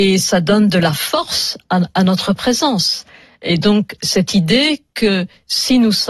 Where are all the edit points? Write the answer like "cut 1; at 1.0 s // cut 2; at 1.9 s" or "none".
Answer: none